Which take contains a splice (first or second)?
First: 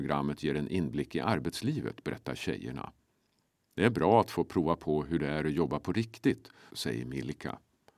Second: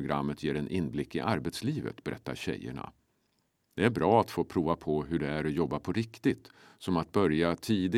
first